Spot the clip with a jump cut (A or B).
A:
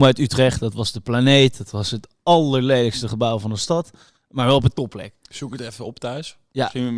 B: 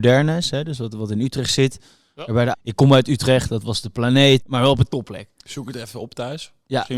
B